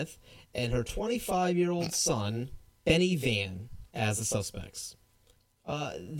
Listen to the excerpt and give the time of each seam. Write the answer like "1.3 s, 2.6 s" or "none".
3.9 s